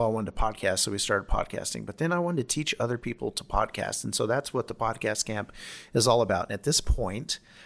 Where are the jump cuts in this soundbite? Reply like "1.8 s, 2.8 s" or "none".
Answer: none